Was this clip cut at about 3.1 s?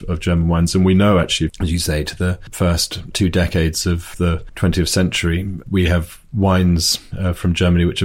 yes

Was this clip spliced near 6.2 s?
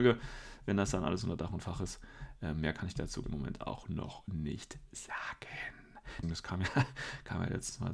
yes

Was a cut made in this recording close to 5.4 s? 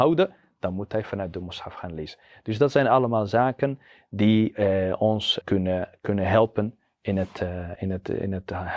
yes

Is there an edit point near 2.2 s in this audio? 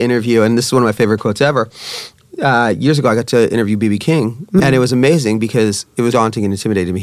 no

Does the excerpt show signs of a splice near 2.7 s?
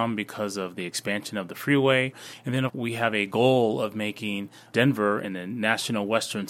yes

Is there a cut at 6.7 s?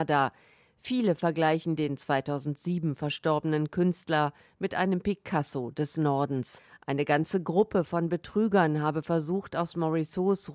no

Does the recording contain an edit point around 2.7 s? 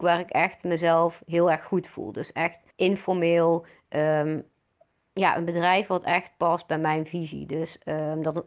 yes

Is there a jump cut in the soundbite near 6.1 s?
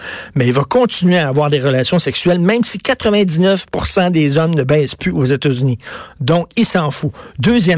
no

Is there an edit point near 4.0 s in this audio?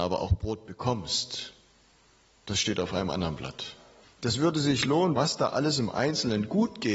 yes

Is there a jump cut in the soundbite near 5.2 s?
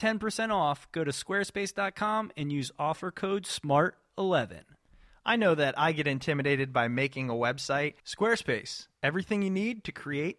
no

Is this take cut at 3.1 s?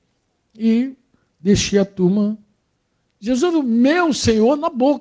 yes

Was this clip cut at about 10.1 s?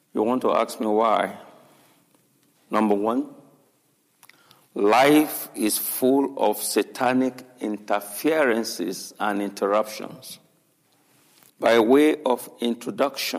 no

